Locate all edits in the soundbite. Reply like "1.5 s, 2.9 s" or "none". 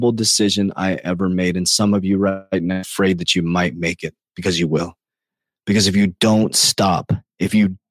none